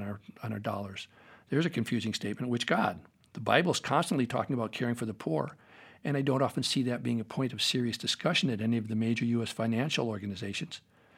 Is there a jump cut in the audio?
no; 0 cuts

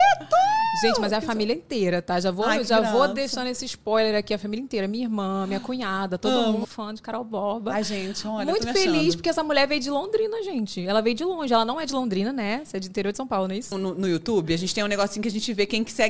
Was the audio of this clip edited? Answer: yes; 2 cuts; at 6.6 s, 13.7 s

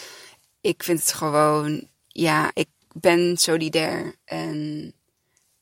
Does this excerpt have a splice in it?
no; 0 cuts

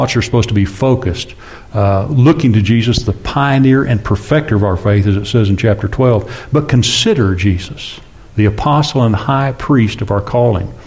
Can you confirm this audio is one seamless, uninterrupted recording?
yes; 0 cuts

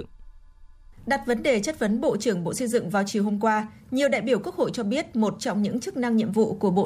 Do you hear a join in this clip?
no; 0 cuts

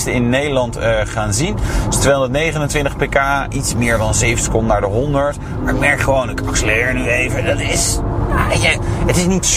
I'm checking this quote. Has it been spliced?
no; 0 cuts

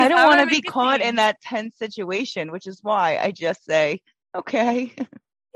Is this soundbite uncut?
yes; 0 cuts

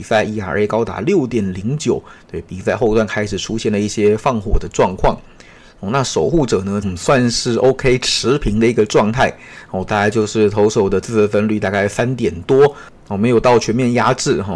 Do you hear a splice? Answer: yes; 1 cut; at 6.8 s

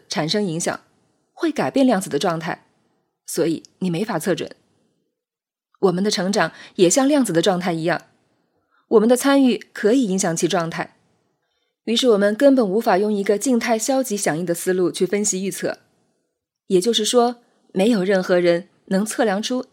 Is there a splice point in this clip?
no; 0 cuts

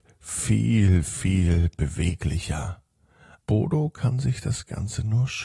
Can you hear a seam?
yes; 1 cut; at 3.4 s

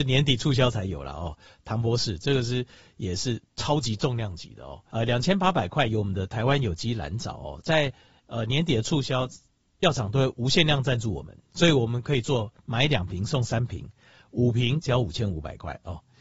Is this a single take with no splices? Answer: no; 1 cut; at 4.9 s

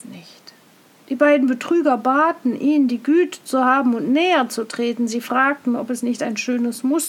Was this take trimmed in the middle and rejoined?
no; 0 cuts

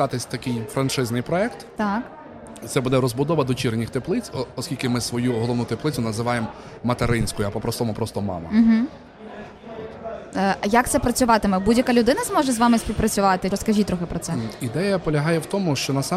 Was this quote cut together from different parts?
yes; 1 cut; at 13.5 s

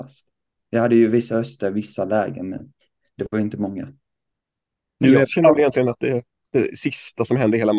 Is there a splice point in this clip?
no; 0 cuts

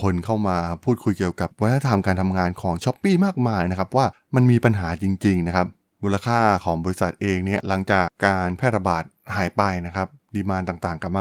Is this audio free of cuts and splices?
no; 1 cut; at 8.1 s

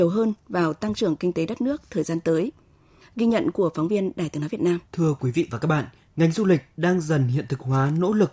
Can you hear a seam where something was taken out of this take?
yes; 2 cuts; at 3.0 s, 4.9 s

